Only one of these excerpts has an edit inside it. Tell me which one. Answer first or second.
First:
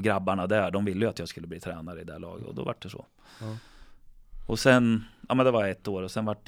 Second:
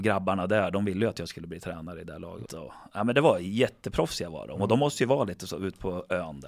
second